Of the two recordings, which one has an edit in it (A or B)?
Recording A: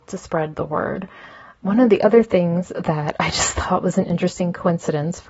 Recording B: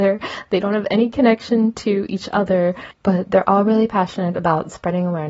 A